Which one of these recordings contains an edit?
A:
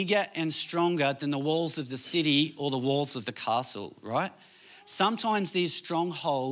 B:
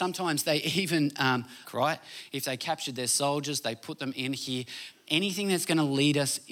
B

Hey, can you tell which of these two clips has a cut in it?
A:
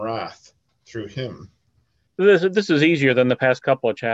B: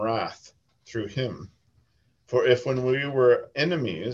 A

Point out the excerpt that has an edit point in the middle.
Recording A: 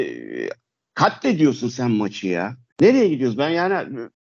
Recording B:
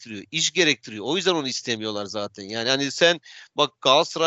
A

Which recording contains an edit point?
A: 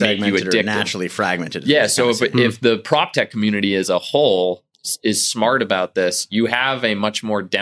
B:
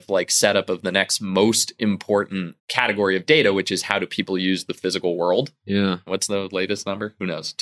B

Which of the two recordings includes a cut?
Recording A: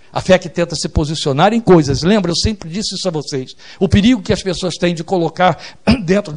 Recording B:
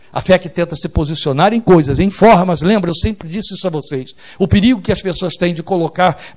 A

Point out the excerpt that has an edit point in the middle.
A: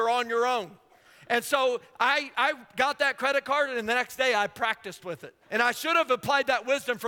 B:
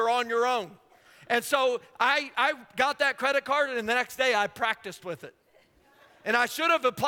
A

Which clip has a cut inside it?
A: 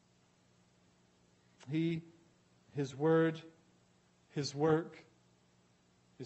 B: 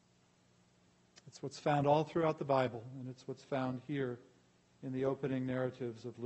B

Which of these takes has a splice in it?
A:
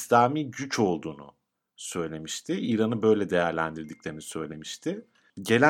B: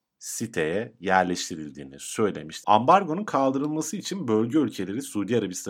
B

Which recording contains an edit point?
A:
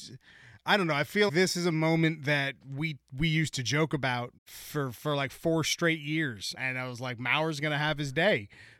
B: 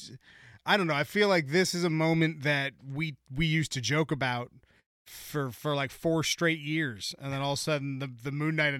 A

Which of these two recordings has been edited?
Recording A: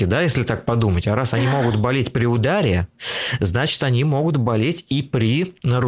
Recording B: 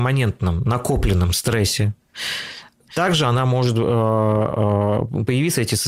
B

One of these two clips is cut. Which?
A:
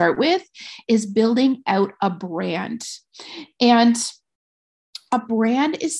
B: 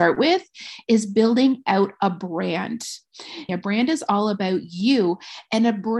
B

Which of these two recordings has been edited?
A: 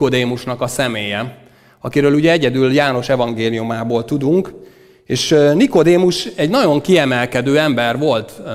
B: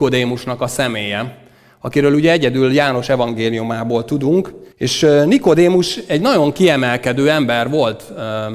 B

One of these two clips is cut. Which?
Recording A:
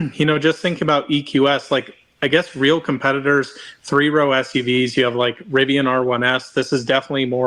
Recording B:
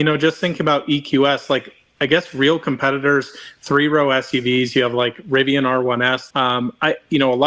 B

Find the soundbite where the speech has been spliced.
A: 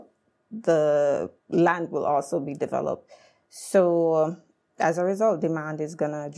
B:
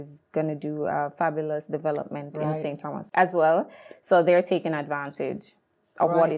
A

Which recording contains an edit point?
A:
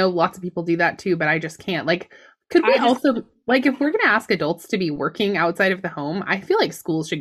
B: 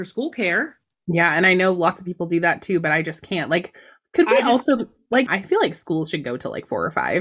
B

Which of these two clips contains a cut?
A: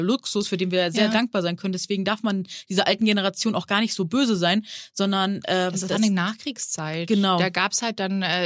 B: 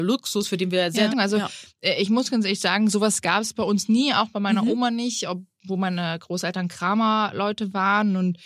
B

